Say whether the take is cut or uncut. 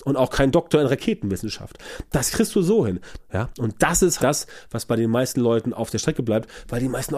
cut